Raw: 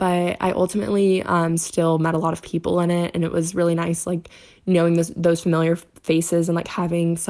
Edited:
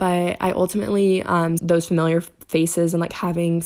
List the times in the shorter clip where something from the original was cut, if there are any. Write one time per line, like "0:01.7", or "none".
0:01.6